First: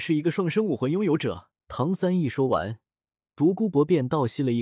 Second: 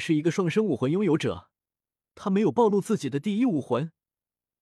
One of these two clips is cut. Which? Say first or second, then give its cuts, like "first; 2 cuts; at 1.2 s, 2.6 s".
first; 1 cut; at 1.6 s